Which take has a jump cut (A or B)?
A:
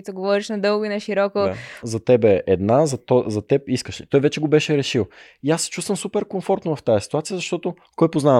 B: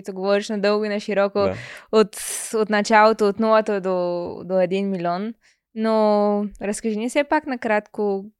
A